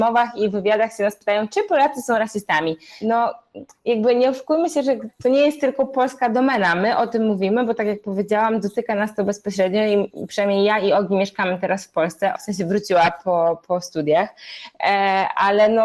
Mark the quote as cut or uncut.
cut